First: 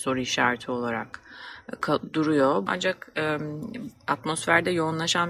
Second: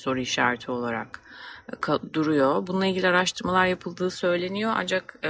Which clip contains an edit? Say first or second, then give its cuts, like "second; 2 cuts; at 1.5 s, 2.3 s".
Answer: first; 1 cut; at 2.7 s